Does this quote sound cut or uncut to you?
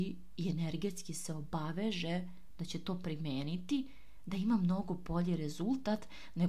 uncut